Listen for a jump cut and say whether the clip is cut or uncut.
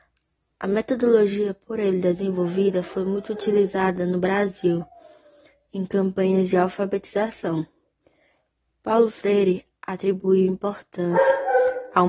uncut